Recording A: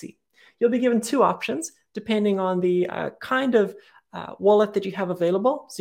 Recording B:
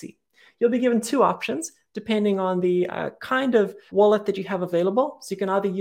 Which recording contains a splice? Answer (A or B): B